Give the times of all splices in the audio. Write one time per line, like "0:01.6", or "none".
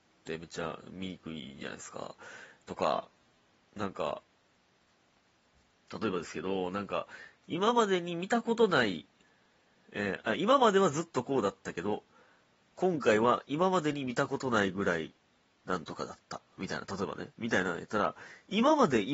none